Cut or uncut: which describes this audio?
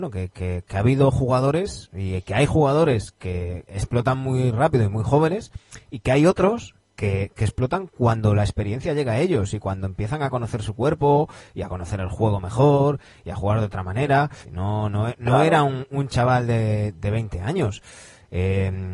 cut